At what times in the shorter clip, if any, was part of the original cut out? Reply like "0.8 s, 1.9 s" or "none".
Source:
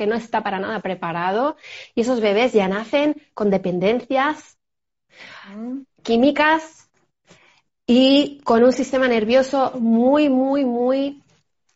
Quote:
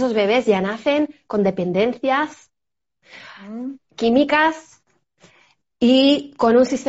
none